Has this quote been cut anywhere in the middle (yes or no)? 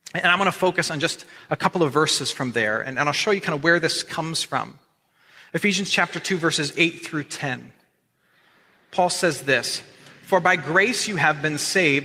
no